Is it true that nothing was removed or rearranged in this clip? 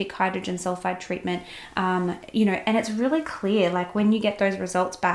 yes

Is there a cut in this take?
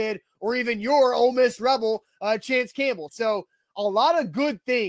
yes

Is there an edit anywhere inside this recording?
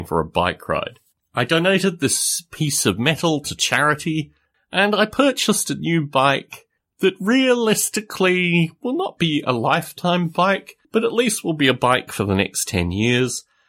yes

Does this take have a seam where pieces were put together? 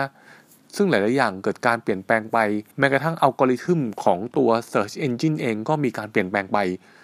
yes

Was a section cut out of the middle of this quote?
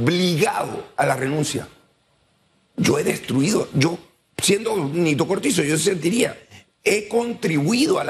yes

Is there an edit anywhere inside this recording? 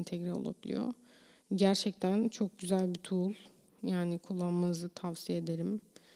no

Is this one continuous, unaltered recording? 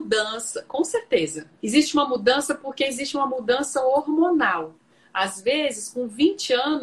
no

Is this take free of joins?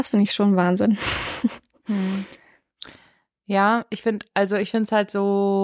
yes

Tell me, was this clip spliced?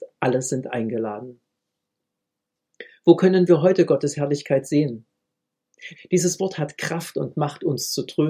yes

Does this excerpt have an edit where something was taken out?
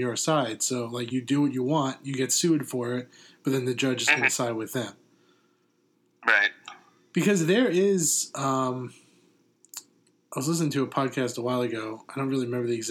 no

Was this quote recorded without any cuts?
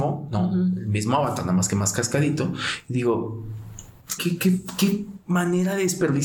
no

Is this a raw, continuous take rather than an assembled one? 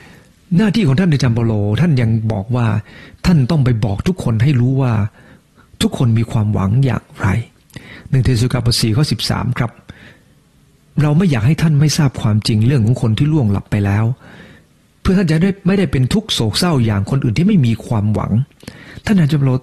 yes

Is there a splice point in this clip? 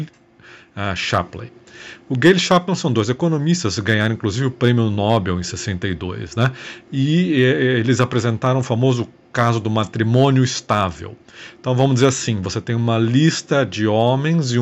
no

